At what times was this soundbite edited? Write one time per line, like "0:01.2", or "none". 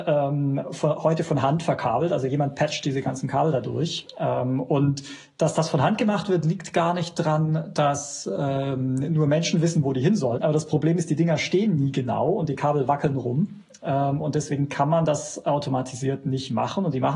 0:10.4